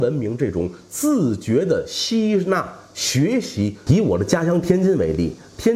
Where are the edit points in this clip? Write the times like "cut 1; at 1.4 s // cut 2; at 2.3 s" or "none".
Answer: cut 1; at 3.9 s